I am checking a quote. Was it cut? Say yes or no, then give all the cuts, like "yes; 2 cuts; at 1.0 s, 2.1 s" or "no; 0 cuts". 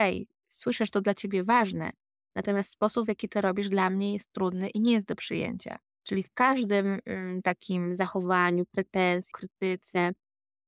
yes; 2 cuts; at 6.0 s, 9.3 s